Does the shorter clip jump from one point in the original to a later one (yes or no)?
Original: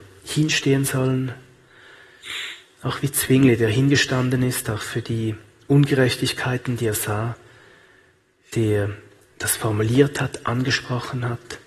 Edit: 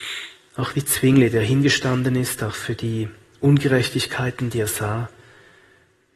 no